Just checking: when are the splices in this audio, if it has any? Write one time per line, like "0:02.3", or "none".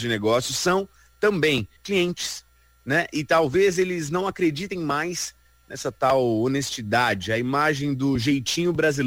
0:01.8